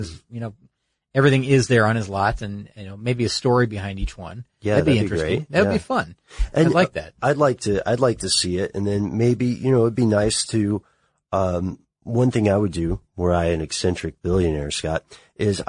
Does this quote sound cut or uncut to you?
uncut